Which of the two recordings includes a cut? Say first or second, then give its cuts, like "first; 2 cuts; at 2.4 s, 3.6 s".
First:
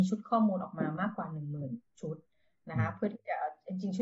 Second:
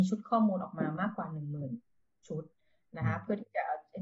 first; 1 cut; at 1.9 s